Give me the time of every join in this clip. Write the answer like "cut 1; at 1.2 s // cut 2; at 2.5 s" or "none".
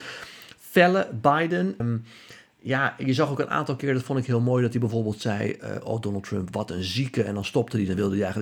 cut 1; at 1.8 s